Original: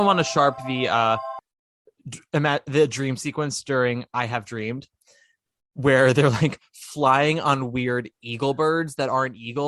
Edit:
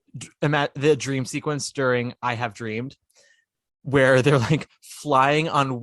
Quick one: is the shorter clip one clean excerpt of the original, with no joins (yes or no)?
yes